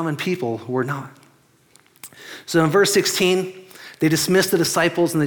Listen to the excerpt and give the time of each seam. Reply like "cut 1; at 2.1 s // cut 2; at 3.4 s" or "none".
none